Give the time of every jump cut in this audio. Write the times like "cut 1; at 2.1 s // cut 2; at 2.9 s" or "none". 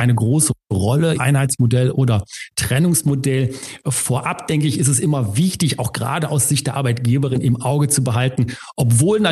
cut 1; at 1.2 s